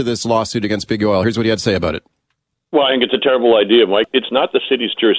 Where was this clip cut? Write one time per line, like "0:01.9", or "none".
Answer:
none